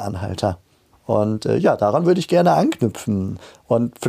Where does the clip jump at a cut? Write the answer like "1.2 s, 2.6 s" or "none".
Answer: 0.9 s